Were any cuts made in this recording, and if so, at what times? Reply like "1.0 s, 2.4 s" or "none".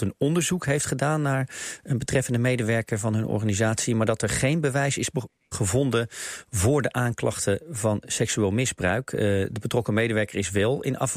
5.5 s